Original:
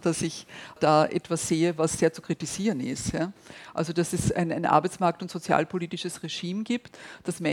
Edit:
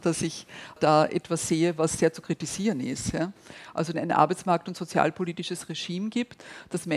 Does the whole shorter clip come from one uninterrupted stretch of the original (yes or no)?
no